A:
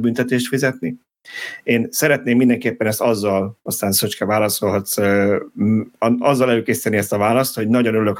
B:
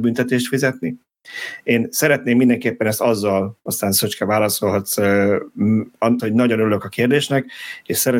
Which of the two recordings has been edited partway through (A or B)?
B